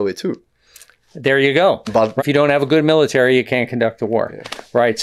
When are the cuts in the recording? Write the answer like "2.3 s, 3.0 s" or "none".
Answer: 2.2 s